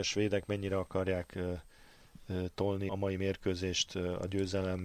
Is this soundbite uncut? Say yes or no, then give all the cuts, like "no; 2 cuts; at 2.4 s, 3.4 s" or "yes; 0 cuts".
no; 1 cut; at 2.9 s